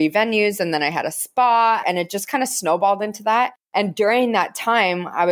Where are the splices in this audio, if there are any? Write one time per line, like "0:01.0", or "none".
0:01.8